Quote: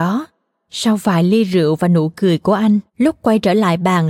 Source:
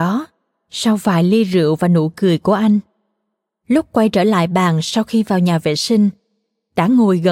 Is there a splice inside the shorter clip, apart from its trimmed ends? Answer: yes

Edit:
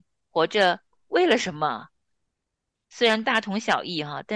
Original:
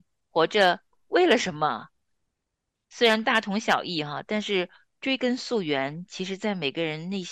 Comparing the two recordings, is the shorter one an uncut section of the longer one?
yes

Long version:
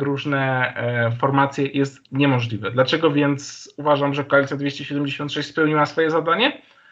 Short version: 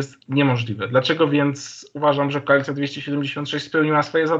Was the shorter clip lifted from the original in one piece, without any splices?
yes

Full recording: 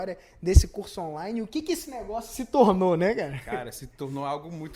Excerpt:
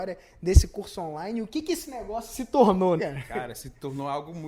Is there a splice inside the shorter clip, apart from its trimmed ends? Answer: yes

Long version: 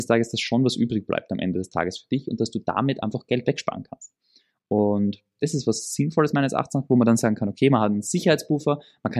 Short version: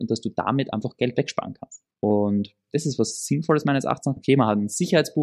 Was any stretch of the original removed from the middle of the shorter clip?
yes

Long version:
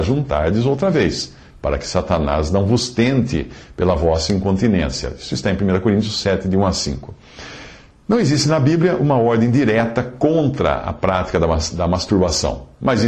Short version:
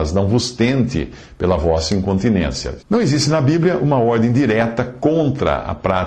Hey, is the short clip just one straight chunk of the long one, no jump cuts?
no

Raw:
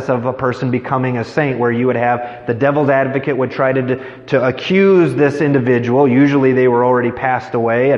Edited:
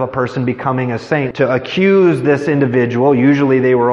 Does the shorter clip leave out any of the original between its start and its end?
yes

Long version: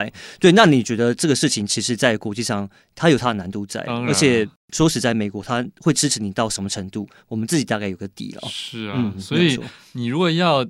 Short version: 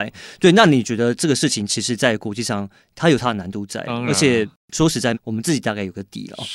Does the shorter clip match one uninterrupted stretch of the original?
no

